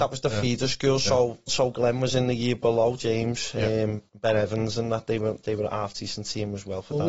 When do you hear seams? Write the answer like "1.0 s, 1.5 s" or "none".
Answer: 1.5 s, 4.1 s